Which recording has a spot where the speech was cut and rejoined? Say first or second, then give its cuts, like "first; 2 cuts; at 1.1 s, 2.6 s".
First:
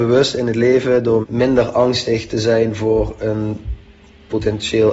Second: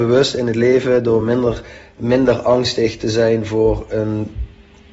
first; 1 cut; at 1.2 s